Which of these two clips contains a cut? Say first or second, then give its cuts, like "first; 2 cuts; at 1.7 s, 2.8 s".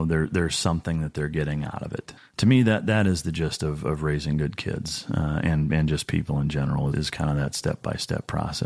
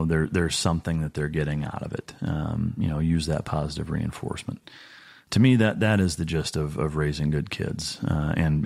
first; 2 cuts; at 2.2 s, 6.9 s